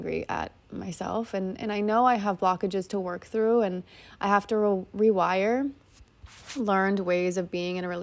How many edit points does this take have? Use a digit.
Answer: 0